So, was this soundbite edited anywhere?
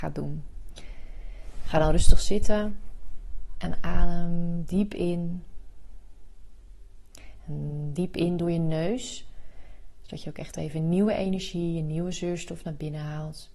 no; 0 cuts

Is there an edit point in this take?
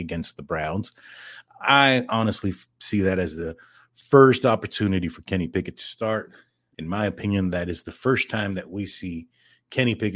yes; 1 cut; at 6.7 s

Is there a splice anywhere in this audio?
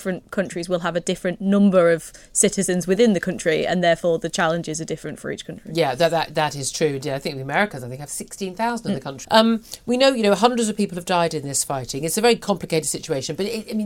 yes; 1 cut; at 9.2 s

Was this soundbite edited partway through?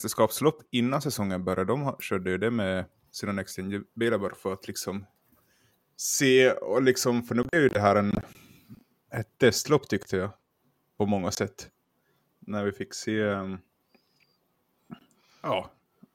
no; 0 cuts

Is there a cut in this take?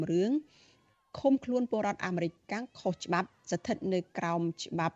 no; 0 cuts

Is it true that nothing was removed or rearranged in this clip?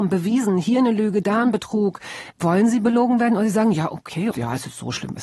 no; 2 cuts; at 2.3 s, 4.3 s

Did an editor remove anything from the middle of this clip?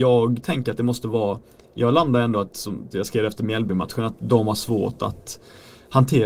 yes; 1 cut; at 2.9 s

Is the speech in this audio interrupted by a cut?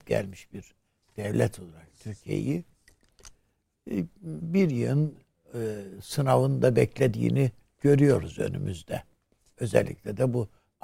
no; 0 cuts

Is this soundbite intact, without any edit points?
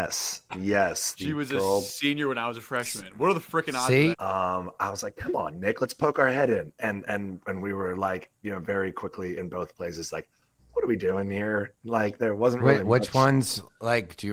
no; 1 cut; at 4.1 s

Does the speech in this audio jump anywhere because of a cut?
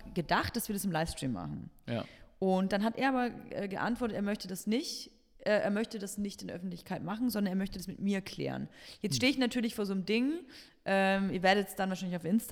no; 0 cuts

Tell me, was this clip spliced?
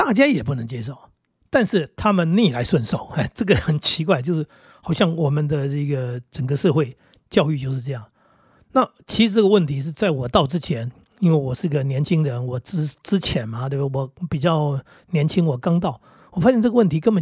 no; 0 cuts

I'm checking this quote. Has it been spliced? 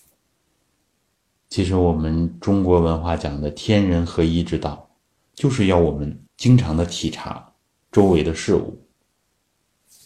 yes; 2 cuts; at 1.4 s, 6.3 s

